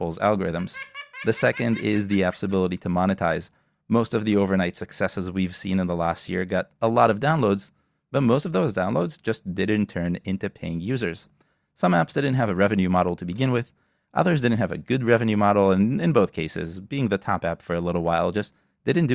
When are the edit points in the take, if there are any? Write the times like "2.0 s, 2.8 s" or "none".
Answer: none